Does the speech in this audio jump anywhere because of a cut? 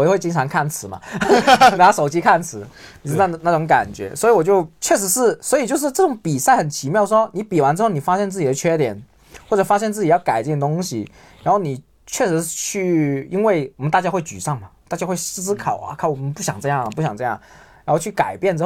no; 0 cuts

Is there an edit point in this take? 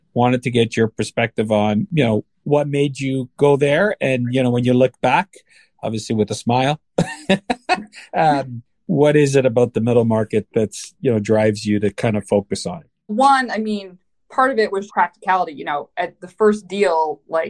yes; 2 cuts; at 13.1 s, 14.9 s

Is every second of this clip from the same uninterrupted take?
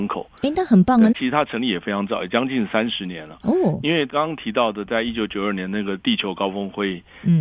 no; 1 cut; at 1.1 s

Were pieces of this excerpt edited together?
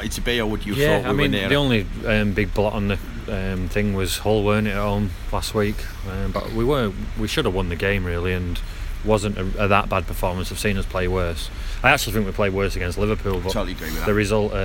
no; 0 cuts

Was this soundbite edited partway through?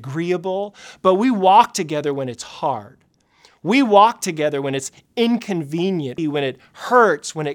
yes; 1 cut; at 6.2 s

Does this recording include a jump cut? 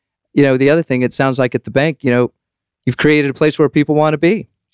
no; 0 cuts

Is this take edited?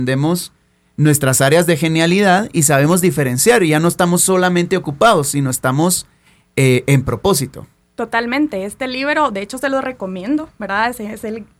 no; 0 cuts

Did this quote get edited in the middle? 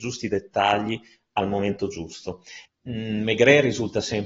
yes; 1 cut; at 2.7 s

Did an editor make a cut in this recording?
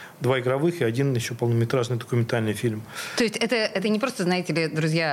no; 0 cuts

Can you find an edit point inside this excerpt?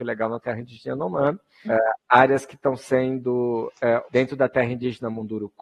yes; 2 cuts; at 1.6 s, 4.0 s

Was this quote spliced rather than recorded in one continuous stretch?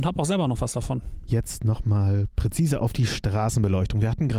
no; 0 cuts

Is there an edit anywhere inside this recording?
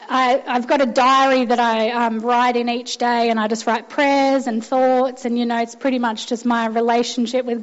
no; 0 cuts

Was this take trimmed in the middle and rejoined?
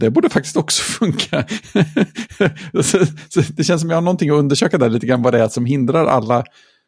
no; 0 cuts

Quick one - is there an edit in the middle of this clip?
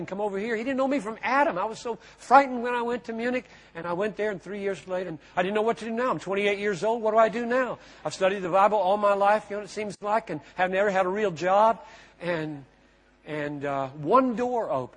yes; 1 cut; at 5.1 s

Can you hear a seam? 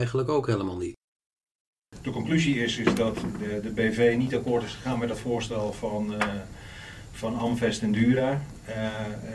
no; 0 cuts

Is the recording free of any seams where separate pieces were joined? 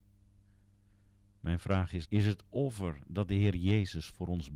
no; 1 cut; at 2.0 s

